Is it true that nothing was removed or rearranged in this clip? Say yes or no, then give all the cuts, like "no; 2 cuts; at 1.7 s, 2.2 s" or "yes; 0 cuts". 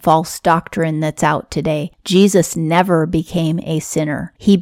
yes; 0 cuts